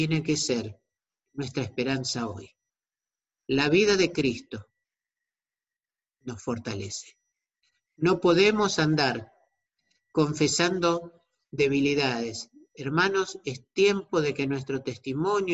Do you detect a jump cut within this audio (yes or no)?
no